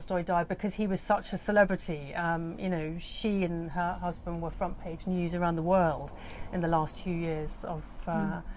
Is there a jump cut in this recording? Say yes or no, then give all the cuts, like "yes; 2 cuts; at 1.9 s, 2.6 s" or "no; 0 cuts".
no; 0 cuts